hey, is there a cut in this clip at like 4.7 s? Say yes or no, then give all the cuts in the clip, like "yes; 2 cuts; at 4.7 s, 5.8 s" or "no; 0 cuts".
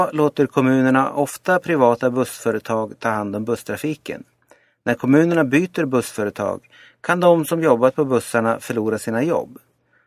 no; 0 cuts